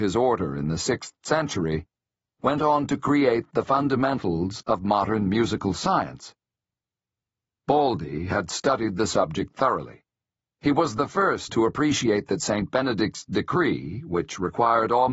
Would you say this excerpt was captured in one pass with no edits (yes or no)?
no